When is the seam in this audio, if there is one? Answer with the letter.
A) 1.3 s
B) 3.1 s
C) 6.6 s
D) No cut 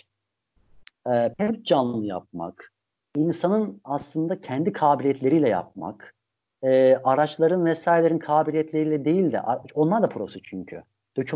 A